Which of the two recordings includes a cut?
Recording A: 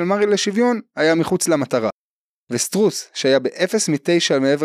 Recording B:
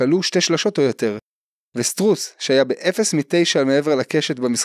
A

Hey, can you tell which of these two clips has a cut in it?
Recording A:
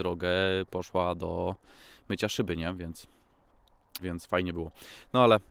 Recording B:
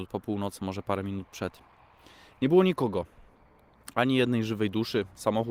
A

